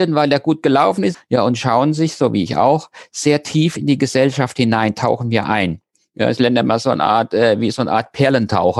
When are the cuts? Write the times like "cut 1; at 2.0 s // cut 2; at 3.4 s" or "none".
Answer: cut 1; at 1.1 s